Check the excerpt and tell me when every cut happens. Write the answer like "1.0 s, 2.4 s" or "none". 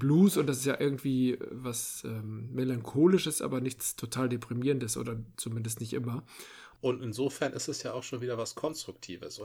6.7 s